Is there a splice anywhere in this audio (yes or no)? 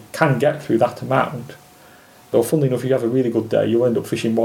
no